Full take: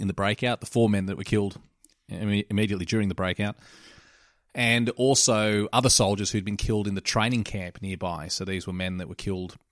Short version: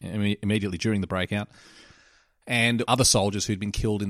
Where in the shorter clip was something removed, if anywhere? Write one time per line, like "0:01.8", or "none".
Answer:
0:02.8

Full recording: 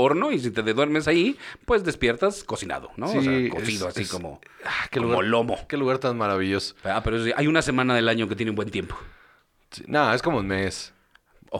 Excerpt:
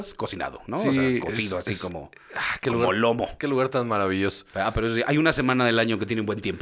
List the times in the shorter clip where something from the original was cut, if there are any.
none

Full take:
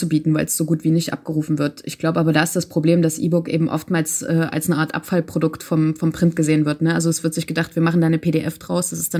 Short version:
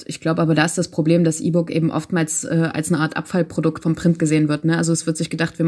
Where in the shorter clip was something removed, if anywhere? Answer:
0:03.8

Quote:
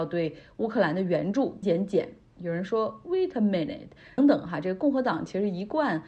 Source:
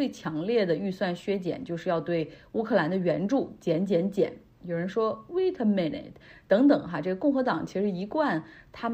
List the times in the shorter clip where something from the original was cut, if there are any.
0:01.6
0:04.2

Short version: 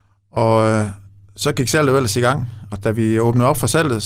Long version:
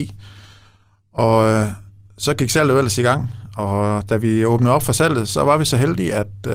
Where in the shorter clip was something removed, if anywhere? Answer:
0:02.7

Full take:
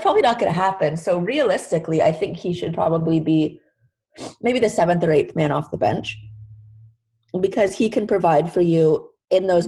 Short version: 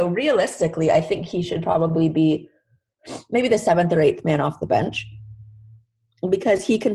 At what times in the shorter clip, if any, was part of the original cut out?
none

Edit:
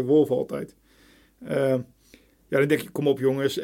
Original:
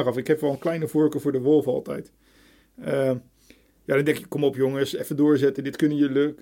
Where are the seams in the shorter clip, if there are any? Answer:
none

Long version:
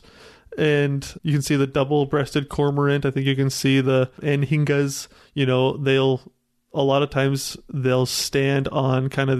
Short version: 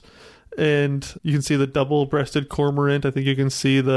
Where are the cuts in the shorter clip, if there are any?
none

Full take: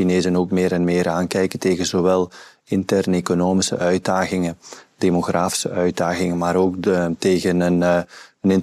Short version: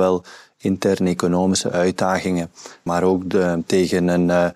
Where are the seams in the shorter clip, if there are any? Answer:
0:02.9

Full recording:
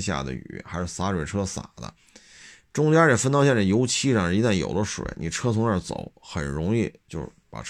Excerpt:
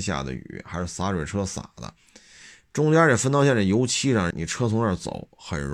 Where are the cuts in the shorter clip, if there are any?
0:04.3

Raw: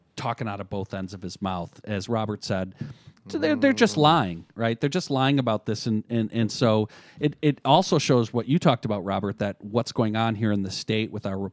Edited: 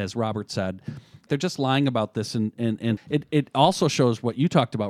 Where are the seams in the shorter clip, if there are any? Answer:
0:01.3
0:03.0

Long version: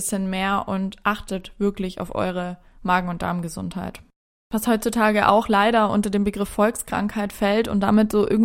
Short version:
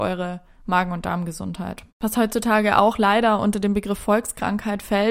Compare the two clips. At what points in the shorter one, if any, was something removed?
0:01.9

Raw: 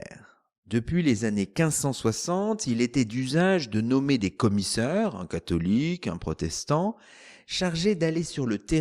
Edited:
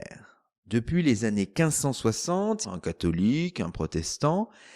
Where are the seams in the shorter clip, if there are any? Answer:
0:02.6

